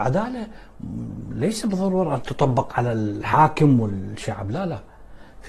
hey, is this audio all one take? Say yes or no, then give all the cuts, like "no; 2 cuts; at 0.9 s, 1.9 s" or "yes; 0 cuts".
no; 1 cut; at 2.7 s